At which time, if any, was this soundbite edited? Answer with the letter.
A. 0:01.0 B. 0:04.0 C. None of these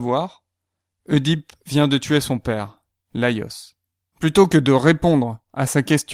B